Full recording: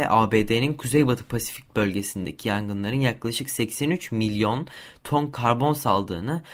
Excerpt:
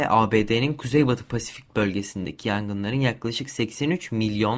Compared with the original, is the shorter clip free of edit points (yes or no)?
yes